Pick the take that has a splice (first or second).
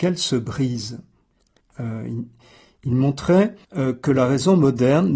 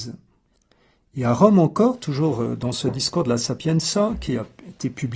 first